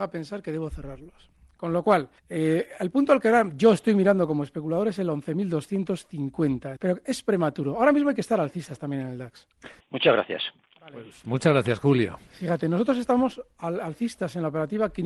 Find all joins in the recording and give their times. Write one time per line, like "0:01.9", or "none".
0:02.2
0:06.8
0:09.8